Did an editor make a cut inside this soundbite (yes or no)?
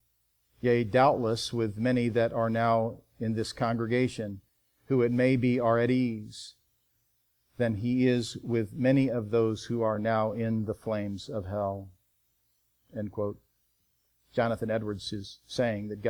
no